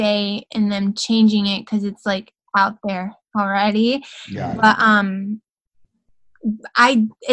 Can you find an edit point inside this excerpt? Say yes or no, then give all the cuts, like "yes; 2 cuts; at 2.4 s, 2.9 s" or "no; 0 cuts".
no; 0 cuts